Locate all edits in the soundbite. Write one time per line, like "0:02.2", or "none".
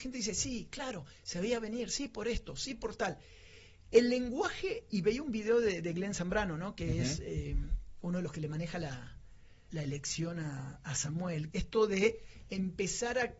0:09.7
0:11.5